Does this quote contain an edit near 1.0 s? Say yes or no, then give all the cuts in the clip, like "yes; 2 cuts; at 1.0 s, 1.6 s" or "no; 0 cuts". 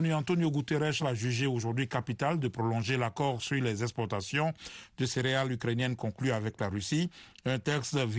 yes; 1 cut; at 1.0 s